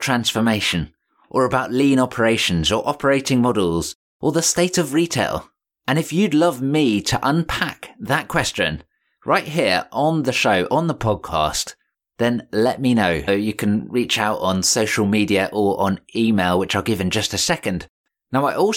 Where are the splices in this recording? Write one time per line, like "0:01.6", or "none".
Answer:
0:13.3